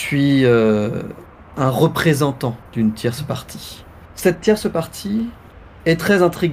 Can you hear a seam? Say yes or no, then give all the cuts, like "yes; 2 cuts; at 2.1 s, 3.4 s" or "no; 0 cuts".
no; 0 cuts